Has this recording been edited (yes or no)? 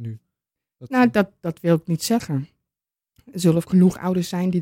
no